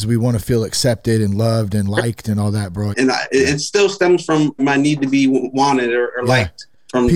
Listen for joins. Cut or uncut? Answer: cut